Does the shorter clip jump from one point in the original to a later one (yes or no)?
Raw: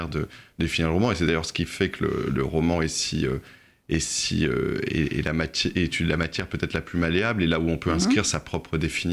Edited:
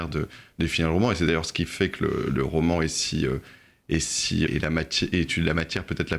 yes